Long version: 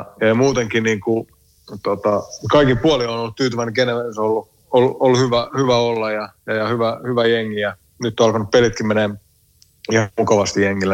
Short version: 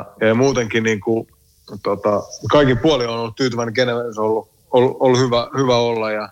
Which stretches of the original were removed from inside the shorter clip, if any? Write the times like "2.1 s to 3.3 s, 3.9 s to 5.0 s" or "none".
none